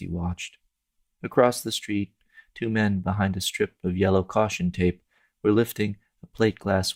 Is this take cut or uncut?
uncut